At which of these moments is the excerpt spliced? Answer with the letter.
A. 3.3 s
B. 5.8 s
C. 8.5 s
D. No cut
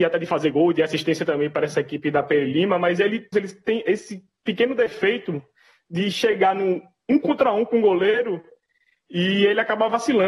A